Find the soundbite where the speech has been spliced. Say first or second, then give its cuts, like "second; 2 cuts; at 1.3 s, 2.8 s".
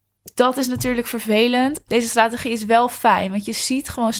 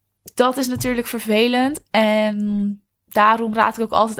first; 1 cut; at 1.9 s